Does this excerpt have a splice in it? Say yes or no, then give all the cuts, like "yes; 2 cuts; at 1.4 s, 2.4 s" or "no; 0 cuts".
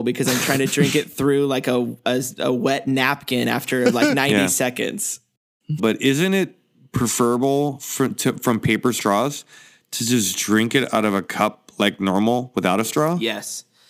yes; 1 cut; at 5.8 s